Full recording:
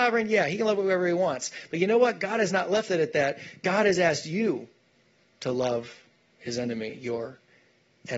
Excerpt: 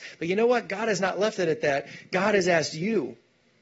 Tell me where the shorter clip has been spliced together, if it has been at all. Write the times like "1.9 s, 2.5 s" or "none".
none